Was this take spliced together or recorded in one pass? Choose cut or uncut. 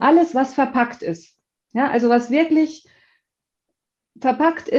uncut